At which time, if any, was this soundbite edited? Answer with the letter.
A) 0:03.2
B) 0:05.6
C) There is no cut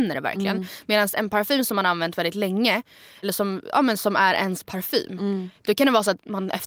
A